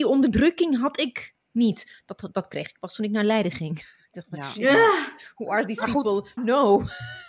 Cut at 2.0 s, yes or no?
no